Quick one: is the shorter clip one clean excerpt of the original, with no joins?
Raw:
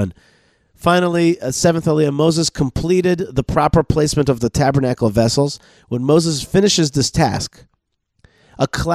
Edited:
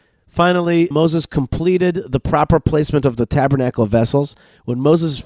no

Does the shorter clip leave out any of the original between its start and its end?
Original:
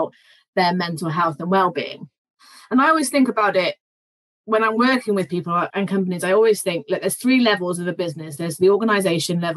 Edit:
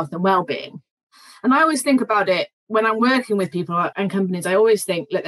yes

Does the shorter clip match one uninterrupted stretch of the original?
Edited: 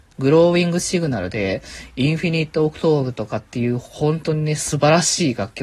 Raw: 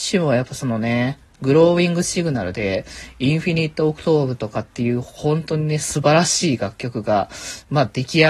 yes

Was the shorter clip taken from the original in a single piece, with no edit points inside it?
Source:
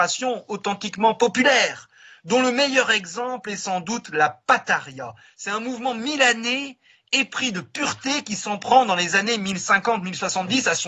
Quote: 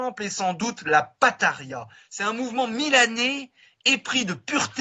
yes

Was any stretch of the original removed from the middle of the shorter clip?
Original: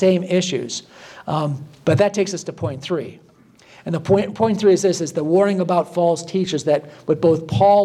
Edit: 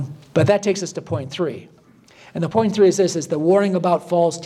yes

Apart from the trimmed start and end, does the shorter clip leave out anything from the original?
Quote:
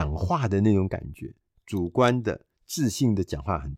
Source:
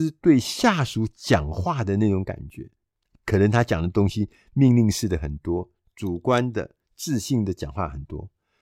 yes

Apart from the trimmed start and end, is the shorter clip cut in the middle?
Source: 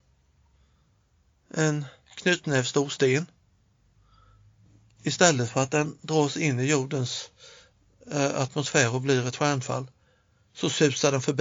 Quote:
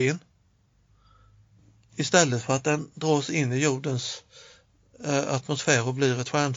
no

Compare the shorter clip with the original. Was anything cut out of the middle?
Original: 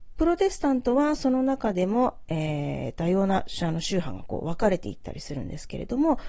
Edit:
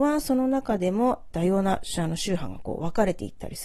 yes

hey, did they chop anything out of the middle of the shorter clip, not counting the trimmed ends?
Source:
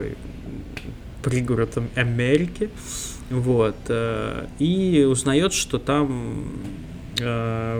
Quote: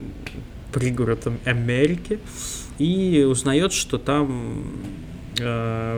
yes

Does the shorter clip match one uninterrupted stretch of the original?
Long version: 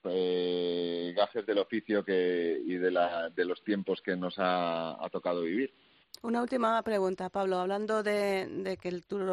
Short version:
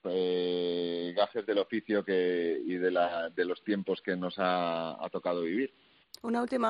yes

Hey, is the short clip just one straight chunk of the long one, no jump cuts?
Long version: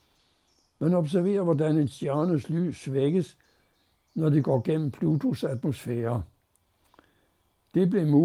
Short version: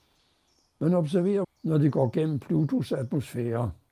no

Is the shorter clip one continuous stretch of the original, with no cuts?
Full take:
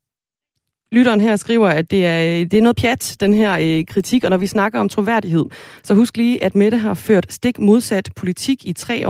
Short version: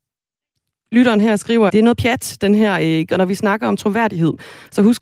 no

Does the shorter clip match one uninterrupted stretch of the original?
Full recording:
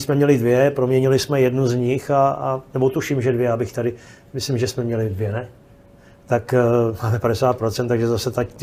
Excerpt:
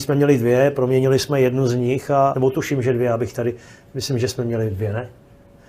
no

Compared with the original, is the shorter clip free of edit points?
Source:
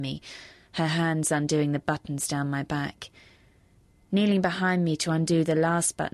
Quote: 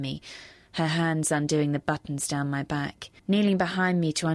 no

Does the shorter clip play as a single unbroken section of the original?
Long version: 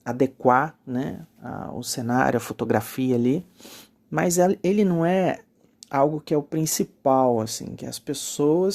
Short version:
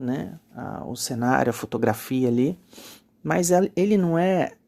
yes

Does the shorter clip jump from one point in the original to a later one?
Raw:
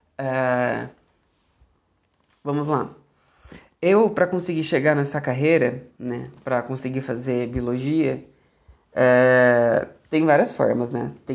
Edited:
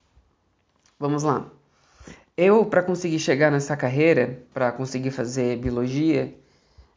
yes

